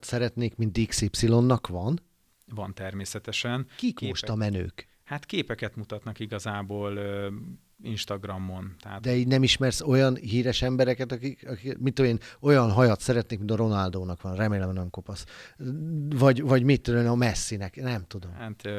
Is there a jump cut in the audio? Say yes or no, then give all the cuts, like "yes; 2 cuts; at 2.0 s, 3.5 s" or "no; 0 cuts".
no; 0 cuts